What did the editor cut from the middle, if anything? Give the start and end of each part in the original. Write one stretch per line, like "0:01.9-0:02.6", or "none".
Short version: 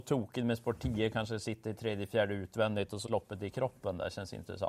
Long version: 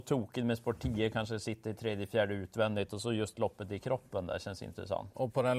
0:03.1-0:03.3